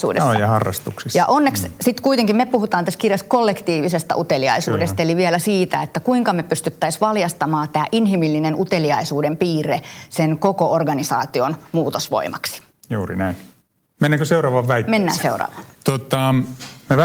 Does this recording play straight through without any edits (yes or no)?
yes